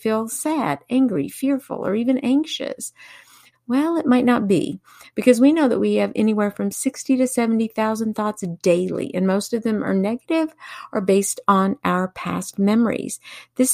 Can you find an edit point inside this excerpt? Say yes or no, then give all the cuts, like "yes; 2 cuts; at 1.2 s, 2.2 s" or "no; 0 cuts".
yes; 1 cut; at 3.5 s